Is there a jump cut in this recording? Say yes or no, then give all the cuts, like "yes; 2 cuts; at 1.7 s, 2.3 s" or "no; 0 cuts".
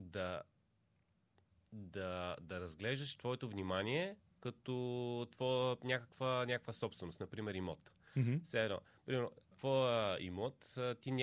yes; 1 cut; at 9.5 s